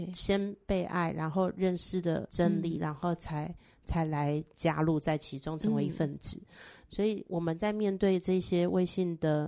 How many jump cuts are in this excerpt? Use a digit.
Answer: 0